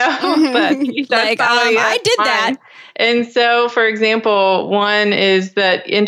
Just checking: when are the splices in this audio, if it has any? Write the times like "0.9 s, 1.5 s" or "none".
2.6 s